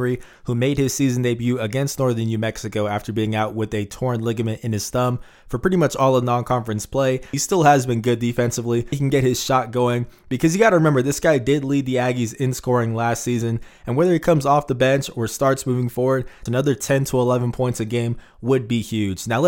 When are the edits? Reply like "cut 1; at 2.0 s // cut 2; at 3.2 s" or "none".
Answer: cut 1; at 7.3 s // cut 2; at 8.9 s // cut 3; at 16.5 s